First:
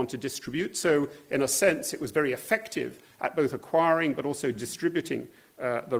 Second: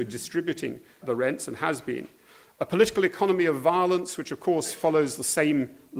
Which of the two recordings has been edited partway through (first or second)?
second